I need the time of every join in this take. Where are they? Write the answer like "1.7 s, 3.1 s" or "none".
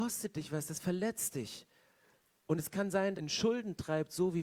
3.1 s